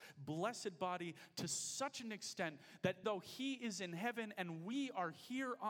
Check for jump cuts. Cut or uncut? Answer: cut